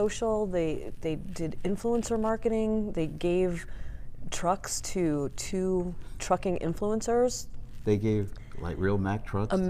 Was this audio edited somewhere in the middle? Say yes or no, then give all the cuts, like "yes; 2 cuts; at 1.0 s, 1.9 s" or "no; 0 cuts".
no; 0 cuts